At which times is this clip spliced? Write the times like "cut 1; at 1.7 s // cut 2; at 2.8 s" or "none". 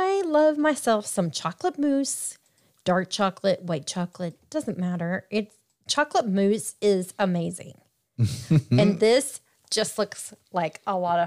none